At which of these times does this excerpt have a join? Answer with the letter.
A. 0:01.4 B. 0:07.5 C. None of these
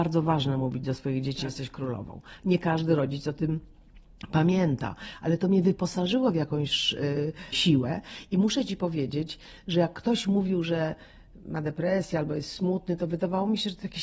B